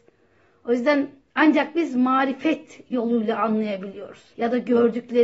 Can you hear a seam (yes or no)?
yes